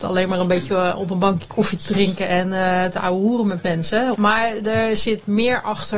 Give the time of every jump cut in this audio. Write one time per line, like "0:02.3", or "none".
0:04.1